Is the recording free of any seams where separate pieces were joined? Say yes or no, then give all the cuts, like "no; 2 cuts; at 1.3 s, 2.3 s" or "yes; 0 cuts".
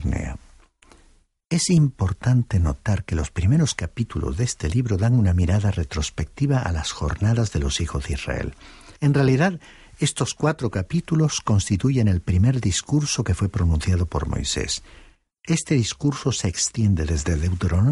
no; 1 cut; at 9.0 s